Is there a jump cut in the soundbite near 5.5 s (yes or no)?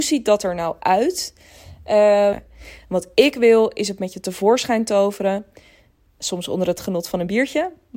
no